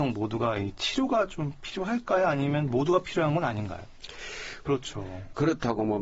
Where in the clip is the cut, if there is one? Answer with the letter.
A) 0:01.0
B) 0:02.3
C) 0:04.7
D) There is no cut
C